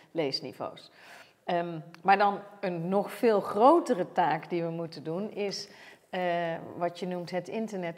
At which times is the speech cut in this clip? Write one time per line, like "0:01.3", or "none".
none